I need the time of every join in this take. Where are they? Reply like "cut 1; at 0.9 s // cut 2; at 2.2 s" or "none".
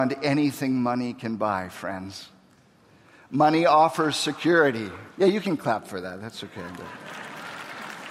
cut 1; at 5.1 s